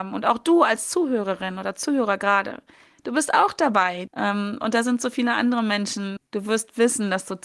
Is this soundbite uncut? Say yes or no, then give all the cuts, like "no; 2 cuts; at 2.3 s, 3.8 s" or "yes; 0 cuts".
no; 2 cuts; at 4.1 s, 6.2 s